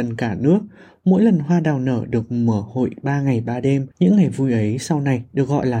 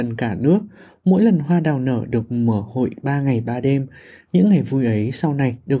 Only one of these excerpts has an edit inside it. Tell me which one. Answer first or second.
first